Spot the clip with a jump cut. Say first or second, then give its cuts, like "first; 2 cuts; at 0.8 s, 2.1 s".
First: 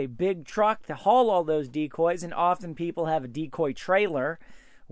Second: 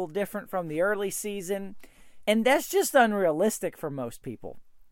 second; 1 cut; at 2.2 s